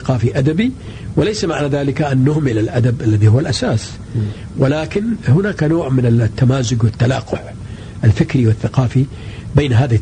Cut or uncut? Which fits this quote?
uncut